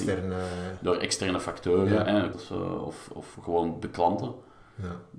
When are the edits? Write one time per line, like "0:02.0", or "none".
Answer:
0:02.3
0:03.3